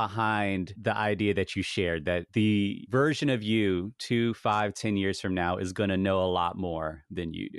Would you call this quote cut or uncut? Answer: uncut